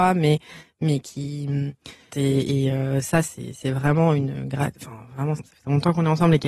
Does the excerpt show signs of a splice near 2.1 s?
yes; 2 cuts; at 2.1 s, 5.4 s

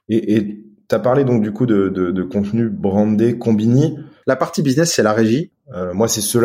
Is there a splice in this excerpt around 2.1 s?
no; 2 cuts; at 4.2 s, 5.5 s

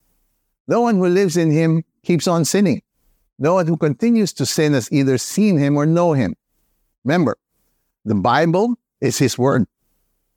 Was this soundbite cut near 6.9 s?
yes; 1 cut; at 6.9 s

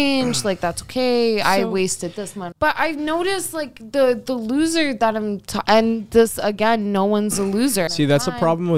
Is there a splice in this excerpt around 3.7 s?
no; 2 cuts; at 2.5 s, 7.9 s

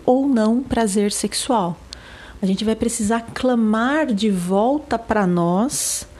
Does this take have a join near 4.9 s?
no; 1 cut; at 2.4 s

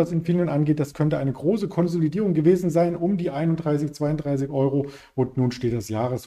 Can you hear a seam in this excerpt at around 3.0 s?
no; 0 cuts

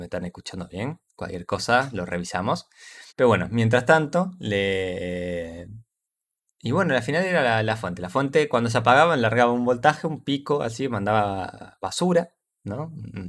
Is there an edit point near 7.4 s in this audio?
no; 1 cut; at 3.1 s

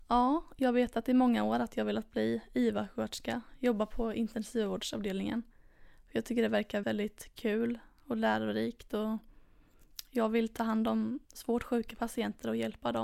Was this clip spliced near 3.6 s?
no; 2 cuts; at 6.8 s, 11.3 s

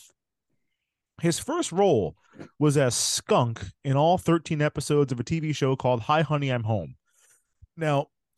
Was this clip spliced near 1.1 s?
no; 0 cuts

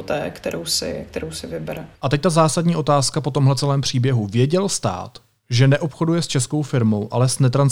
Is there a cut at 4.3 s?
no; 1 cut; at 1.9 s

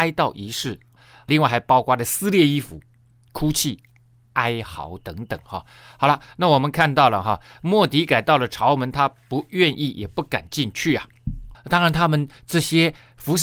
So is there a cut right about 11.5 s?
yes; 1 cut; at 11.5 s

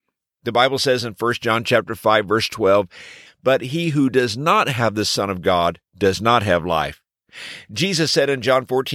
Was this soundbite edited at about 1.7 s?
no; 2 cuts; at 3.3 s, 5.9 s

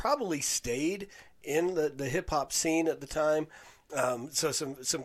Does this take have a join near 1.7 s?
no; 1 cut; at 3.9 s

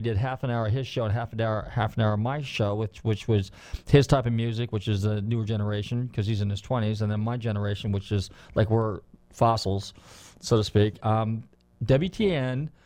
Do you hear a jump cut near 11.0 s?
yes; 1 cut; at 11.0 s

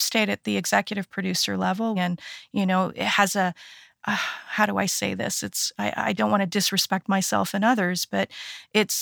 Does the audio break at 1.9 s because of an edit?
yes; 1 cut; at 1.9 s

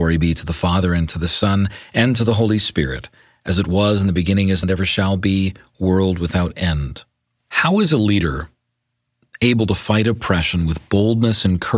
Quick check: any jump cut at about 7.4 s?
yes; 2 cuts; at 4.6 s, 7.4 s

